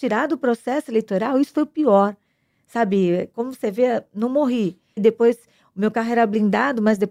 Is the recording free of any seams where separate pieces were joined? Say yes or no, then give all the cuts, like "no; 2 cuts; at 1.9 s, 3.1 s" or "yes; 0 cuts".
no; 1 cut; at 5.0 s